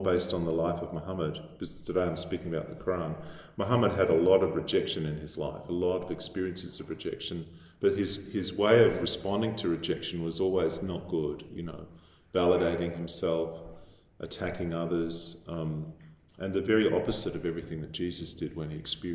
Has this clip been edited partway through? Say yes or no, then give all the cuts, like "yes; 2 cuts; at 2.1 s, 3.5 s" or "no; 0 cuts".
no; 0 cuts